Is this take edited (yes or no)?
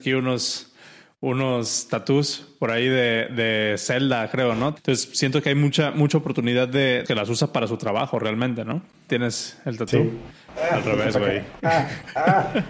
yes